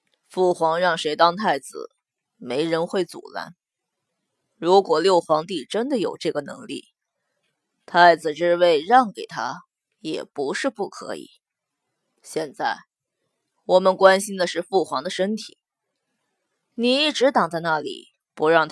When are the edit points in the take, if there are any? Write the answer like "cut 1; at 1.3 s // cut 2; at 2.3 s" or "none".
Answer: none